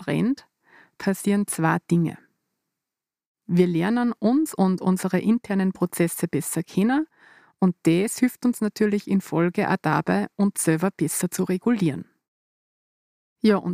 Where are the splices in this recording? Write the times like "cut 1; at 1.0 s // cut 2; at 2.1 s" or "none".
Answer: cut 1; at 3.4 s